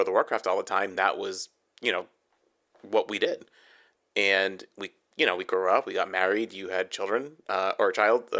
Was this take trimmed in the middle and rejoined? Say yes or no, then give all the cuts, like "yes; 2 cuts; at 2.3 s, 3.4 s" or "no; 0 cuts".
no; 0 cuts